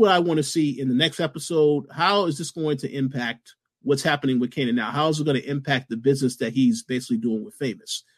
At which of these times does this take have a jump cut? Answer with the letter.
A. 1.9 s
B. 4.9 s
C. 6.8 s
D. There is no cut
D